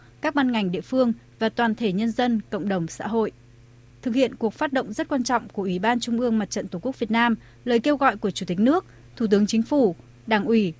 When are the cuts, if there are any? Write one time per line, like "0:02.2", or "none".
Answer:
none